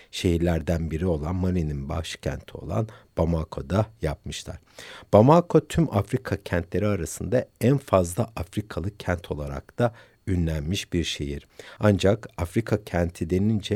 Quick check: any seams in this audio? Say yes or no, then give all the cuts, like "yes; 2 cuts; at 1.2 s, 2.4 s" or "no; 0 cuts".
no; 0 cuts